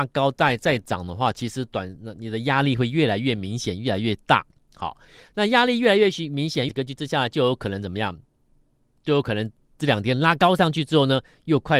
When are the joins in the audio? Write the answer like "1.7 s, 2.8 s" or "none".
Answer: 6.7 s